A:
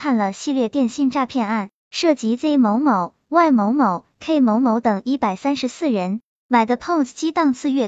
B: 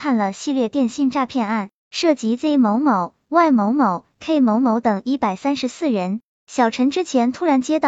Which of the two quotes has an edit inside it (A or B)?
A